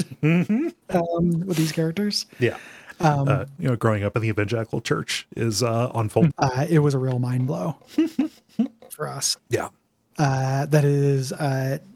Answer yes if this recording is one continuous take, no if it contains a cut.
no